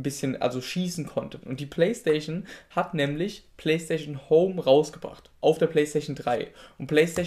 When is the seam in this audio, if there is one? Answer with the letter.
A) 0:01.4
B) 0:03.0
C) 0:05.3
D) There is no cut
A